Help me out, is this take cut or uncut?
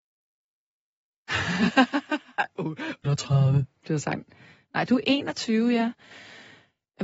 cut